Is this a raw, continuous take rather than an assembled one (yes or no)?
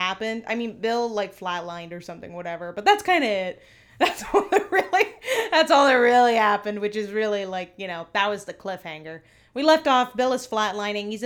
yes